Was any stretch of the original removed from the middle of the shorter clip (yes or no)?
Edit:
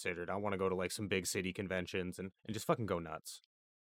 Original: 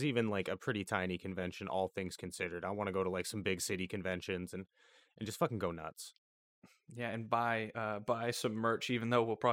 yes